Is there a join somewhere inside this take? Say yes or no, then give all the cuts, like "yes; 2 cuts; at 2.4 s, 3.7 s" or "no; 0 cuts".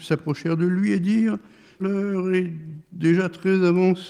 yes; 1 cut; at 1.8 s